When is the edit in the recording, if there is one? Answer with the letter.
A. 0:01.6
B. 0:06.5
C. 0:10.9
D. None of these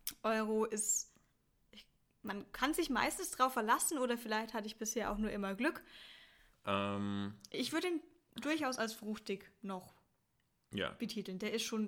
B